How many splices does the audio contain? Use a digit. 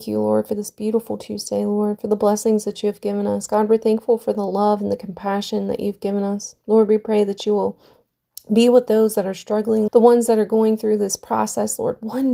1